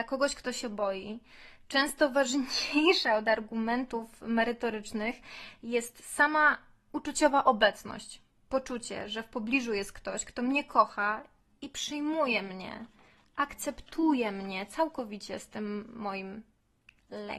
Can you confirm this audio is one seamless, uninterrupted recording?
yes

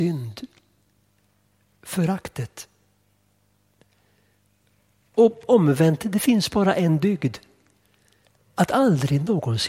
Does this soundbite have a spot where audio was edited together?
no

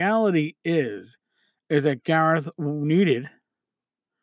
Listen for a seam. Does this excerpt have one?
no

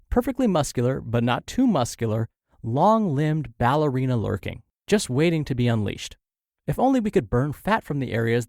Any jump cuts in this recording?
no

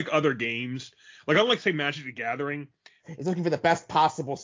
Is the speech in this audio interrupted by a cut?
yes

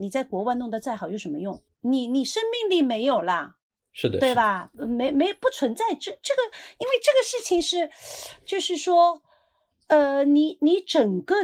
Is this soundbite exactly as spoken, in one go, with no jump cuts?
no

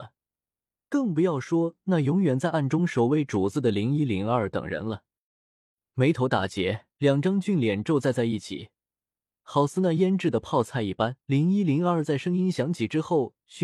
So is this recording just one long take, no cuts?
no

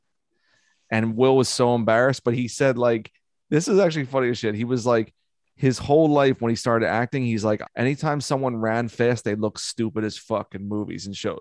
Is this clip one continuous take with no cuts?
no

